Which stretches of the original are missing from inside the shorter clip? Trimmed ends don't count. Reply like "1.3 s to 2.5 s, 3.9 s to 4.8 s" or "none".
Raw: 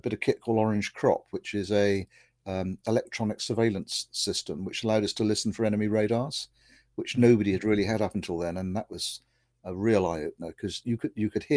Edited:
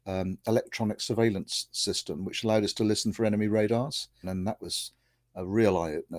6.6 s to 8.5 s